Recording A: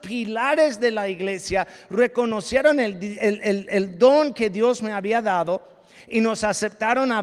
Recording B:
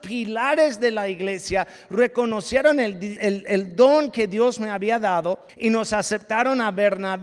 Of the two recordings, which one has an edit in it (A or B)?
B